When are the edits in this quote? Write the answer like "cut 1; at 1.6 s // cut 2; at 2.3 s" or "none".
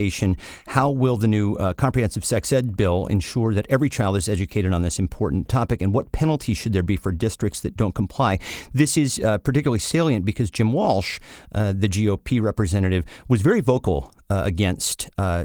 none